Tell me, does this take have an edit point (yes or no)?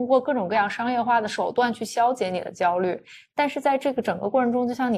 no